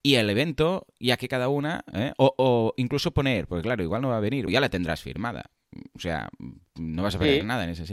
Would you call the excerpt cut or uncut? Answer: cut